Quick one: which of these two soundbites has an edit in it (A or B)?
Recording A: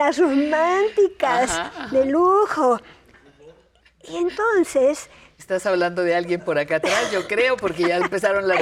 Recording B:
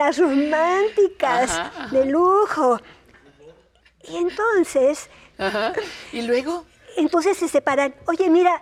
B